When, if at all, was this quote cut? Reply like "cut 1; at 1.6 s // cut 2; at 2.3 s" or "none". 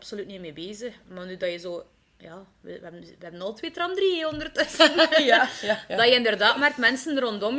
none